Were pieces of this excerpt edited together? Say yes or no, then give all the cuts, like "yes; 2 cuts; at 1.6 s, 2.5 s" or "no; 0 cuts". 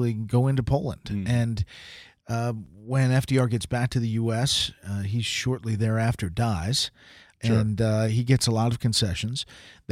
yes; 1 cut; at 7.3 s